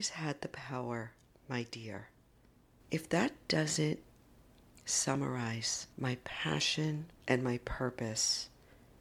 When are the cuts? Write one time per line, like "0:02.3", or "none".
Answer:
0:02.8
0:05.9
0:07.2